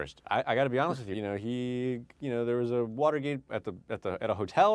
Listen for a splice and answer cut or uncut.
cut